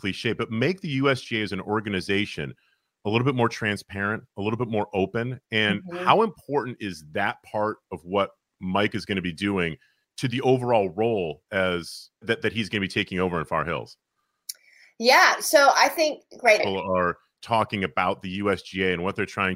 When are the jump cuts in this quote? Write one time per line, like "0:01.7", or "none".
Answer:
0:12.2
0:16.6